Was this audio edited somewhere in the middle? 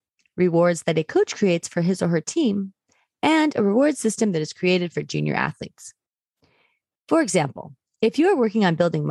yes; 1 cut; at 6.9 s

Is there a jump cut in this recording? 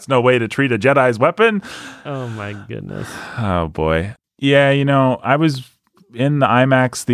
yes; 1 cut; at 4.2 s

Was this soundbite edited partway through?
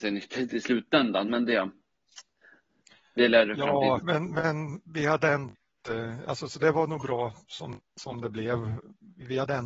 yes; 1 cut; at 4.0 s

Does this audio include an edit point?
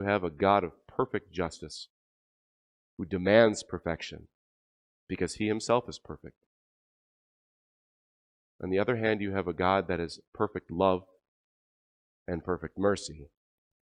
no; 0 cuts

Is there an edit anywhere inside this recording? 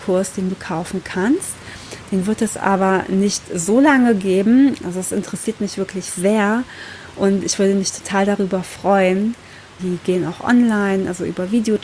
yes; 2 cuts; at 4.8 s, 9.8 s

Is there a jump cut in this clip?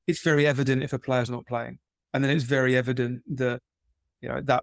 no; 0 cuts

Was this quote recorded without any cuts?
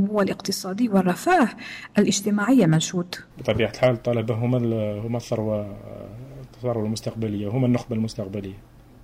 no; 1 cut; at 3.3 s

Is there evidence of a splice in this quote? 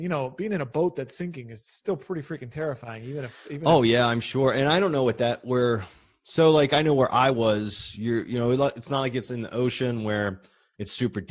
no; 0 cuts

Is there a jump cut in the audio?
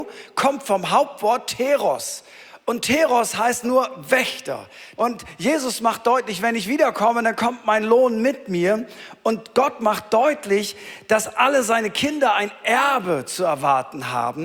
yes; 2 cuts; at 3.6 s, 5.0 s

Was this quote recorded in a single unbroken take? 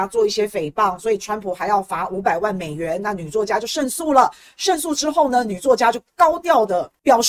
yes; 0 cuts

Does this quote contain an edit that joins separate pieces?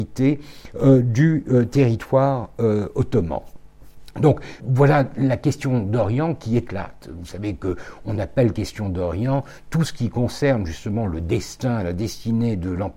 yes; 1 cut; at 4.6 s

